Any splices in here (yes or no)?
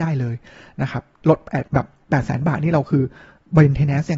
yes